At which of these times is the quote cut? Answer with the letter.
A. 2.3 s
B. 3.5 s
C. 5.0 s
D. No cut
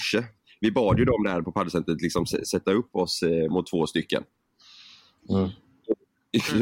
B